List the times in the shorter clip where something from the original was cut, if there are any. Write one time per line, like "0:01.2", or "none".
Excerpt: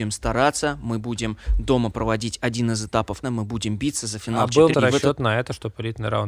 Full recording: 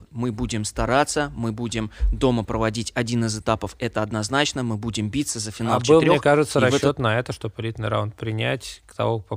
0:03.2
0:04.7